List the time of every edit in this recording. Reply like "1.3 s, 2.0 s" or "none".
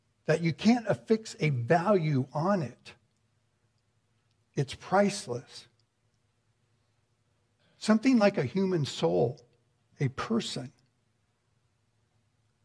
none